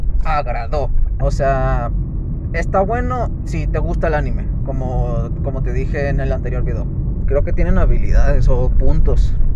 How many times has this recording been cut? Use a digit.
2